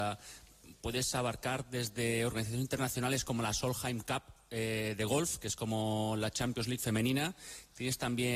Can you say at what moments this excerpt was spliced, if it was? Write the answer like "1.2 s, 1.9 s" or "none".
none